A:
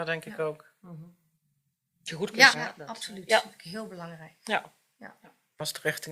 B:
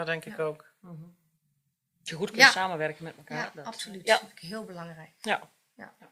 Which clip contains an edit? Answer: A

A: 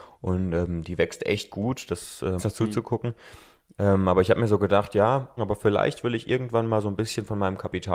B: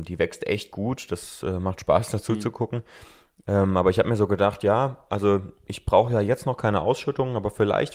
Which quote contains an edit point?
A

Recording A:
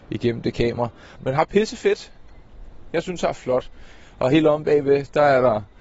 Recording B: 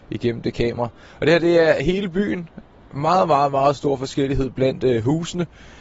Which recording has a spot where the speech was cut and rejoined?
A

